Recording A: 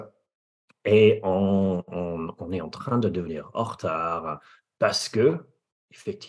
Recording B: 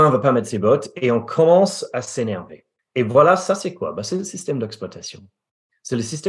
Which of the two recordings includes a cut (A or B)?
B